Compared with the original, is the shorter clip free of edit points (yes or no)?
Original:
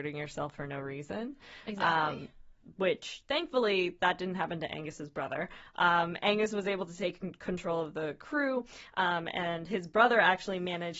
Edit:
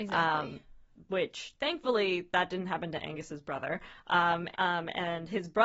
no